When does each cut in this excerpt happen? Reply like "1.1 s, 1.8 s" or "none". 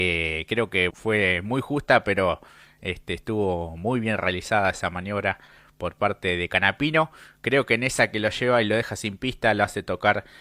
0.9 s